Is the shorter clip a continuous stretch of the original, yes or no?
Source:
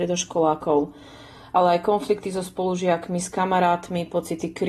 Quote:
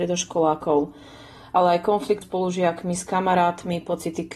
no